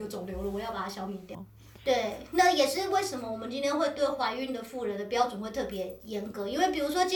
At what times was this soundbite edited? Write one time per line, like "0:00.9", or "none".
0:01.3